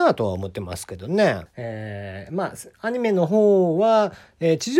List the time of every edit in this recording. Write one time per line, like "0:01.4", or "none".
0:01.5

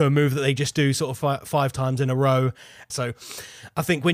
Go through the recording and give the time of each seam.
0:02.9

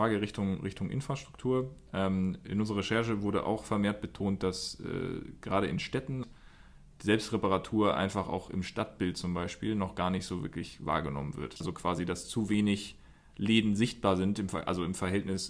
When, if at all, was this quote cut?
none

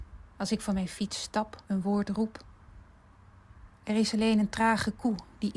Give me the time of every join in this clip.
0:01.6

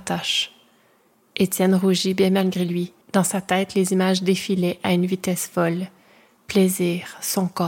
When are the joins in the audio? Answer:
0:03.0

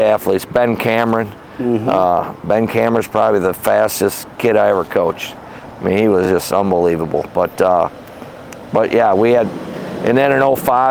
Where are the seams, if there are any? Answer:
none

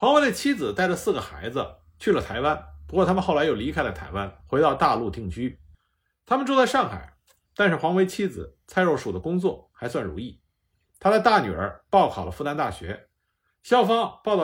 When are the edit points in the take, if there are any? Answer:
0:04.4
0:07.4

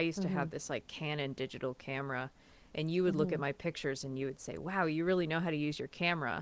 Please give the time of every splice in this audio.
none

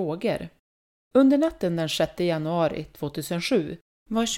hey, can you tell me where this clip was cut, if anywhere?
0:01.0

